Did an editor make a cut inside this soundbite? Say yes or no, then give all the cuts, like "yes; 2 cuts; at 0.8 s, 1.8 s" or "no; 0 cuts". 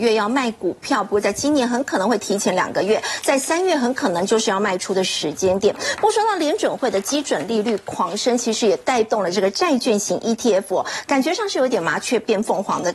no; 0 cuts